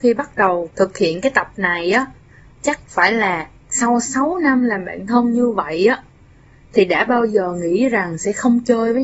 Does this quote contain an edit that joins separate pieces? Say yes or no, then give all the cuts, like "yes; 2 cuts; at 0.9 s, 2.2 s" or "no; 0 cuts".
no; 0 cuts